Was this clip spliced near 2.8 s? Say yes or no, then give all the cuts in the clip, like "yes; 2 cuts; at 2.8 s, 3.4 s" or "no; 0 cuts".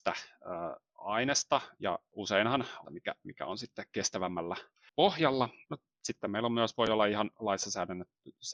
yes; 2 cuts; at 2.8 s, 5.6 s